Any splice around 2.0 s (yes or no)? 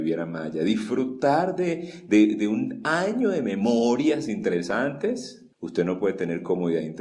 no